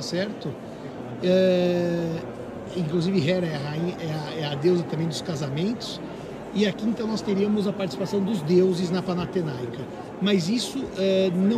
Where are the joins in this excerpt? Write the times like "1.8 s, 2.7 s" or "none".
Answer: none